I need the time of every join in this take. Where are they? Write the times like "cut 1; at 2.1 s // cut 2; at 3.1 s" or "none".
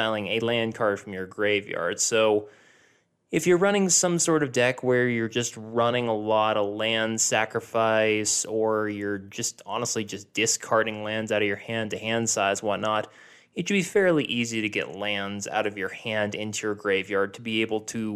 none